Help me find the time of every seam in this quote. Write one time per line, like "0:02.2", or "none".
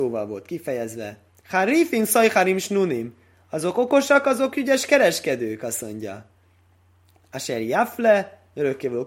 0:01.4